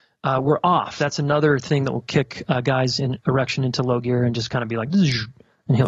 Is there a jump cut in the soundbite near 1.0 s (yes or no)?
yes